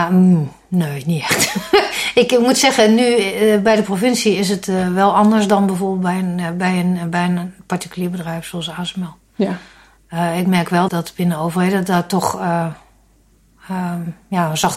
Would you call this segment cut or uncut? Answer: cut